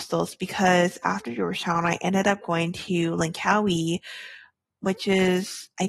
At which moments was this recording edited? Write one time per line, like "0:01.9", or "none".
none